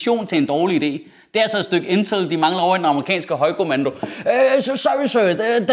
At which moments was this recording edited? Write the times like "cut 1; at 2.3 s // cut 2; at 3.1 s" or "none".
none

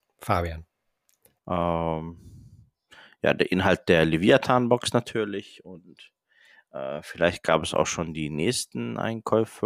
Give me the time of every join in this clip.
cut 1; at 1.4 s

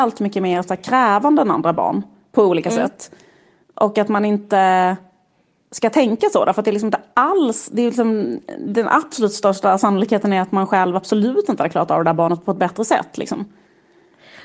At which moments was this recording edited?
none

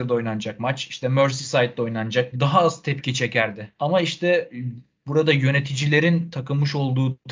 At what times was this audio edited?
cut 1; at 2.3 s // cut 2; at 3.8 s

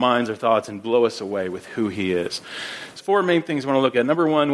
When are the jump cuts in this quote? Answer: cut 1; at 3.0 s

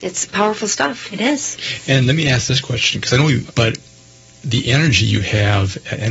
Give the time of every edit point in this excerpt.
cut 1; at 3.5 s

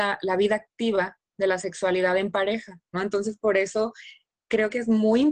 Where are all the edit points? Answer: cut 1; at 2.9 s

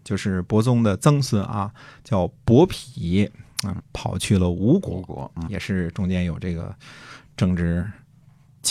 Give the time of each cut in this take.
cut 1; at 3.8 s // cut 2; at 5.5 s

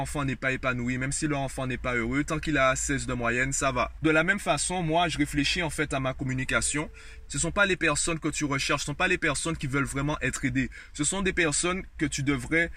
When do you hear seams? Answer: cut 1; at 4.0 s // cut 2; at 7.3 s

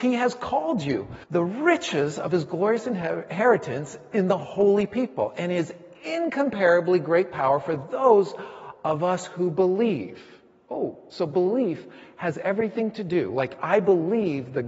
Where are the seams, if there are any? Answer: cut 1; at 1.2 s

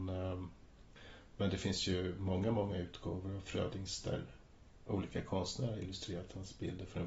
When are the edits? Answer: none

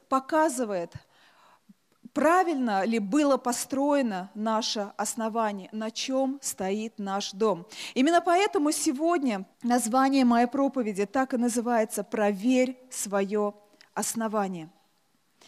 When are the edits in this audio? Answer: cut 1; at 9.5 s

